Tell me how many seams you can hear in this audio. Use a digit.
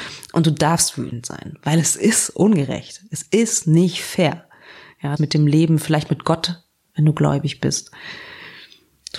1